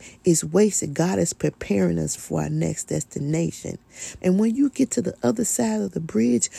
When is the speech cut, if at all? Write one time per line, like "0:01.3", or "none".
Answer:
0:02.2
0:04.2